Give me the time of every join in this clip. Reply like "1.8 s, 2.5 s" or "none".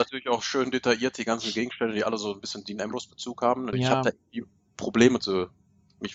3.7 s